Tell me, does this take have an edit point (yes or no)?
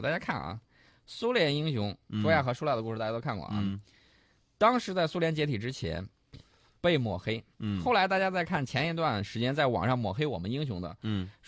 yes